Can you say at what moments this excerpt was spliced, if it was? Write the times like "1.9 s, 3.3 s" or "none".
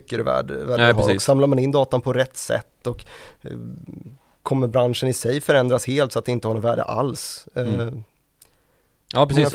none